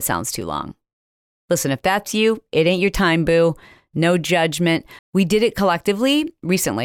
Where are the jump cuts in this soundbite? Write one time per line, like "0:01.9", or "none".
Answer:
0:05.0

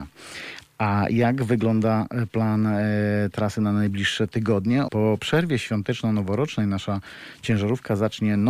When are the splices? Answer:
0:04.9

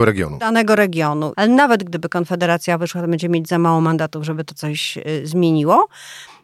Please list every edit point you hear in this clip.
0:01.3

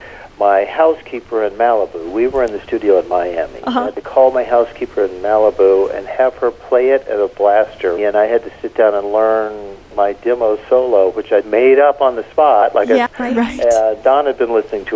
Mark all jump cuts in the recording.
0:08.0
0:11.4
0:13.1

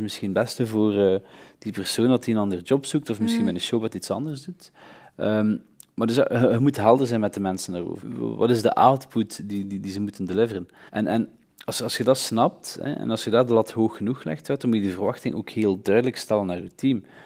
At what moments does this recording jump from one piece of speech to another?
0:08.0
0:10.9

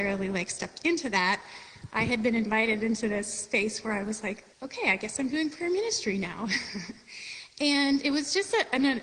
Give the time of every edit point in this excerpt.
0:04.5

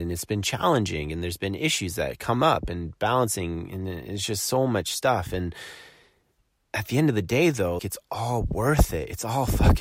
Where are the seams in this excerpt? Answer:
0:07.8

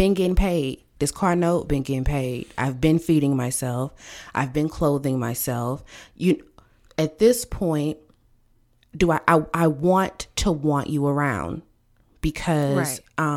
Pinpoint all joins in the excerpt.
none

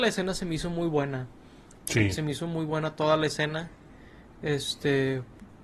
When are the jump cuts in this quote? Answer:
none

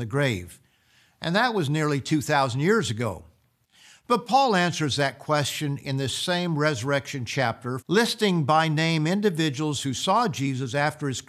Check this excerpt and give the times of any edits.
0:07.8

